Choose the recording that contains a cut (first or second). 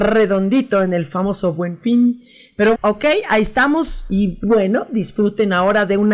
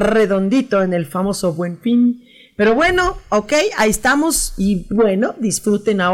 first